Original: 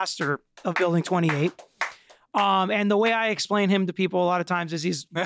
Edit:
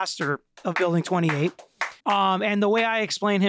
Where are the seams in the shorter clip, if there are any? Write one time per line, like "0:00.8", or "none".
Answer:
0:02.0